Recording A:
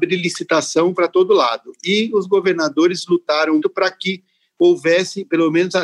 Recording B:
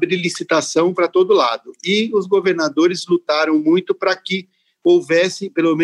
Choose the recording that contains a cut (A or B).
A